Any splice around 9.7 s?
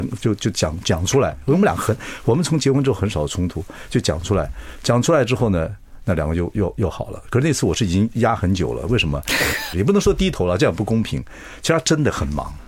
yes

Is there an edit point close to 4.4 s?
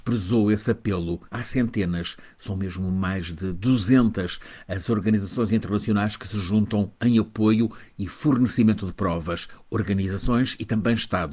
no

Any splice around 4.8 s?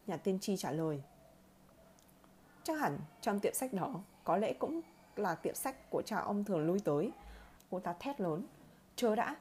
no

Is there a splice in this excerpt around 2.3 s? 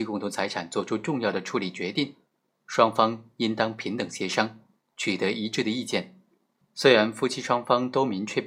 no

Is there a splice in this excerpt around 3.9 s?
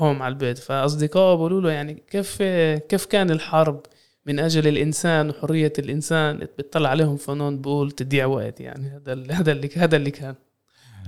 no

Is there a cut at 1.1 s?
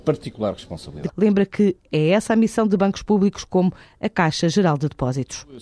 yes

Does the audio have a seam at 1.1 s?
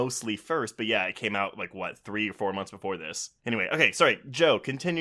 no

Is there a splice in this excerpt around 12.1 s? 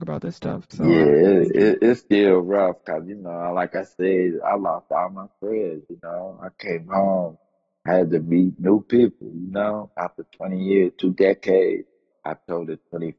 yes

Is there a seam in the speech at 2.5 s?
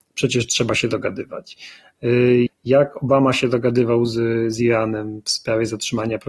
yes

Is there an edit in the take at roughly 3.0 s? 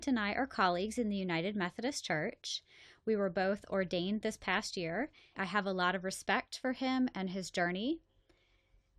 no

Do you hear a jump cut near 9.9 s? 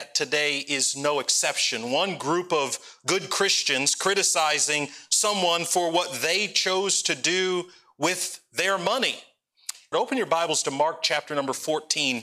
yes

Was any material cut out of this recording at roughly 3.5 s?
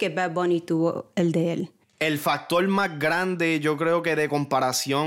no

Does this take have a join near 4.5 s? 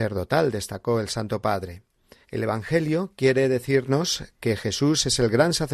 no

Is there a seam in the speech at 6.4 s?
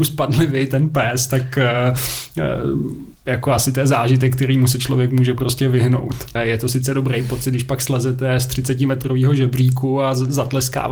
yes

